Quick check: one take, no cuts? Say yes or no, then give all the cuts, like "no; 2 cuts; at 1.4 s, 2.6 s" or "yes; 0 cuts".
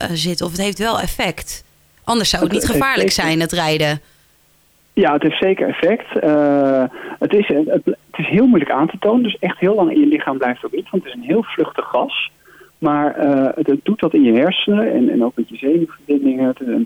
yes; 0 cuts